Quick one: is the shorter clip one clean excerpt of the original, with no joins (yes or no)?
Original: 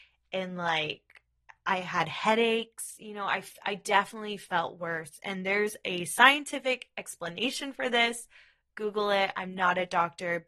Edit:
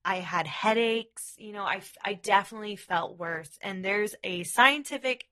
yes